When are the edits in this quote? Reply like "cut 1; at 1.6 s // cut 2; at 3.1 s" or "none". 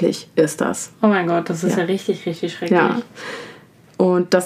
none